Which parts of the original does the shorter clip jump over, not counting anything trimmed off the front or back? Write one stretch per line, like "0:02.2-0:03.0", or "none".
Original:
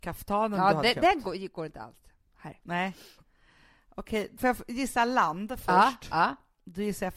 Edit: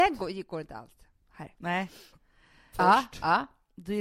0:03.8-0:05.6